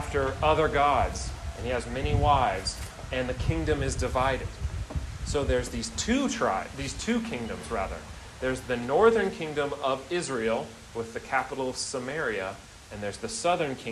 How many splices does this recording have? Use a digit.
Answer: 0